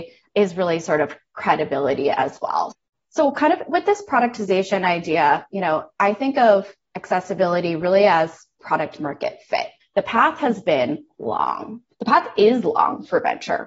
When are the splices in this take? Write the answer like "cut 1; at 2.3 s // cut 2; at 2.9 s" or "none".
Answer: cut 1; at 9.8 s